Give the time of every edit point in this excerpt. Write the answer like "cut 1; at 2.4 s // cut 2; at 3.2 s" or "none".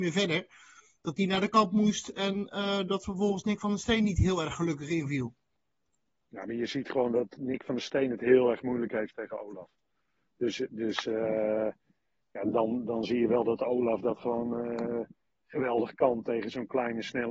none